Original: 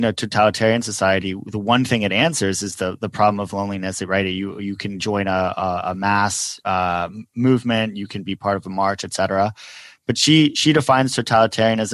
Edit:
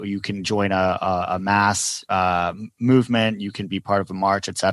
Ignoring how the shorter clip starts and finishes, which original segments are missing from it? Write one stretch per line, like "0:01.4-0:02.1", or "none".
none